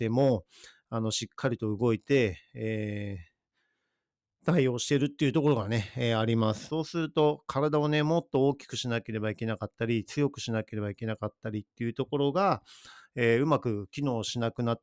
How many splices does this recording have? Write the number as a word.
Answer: one